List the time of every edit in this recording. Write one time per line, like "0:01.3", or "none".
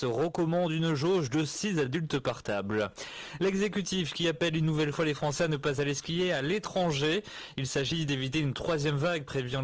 none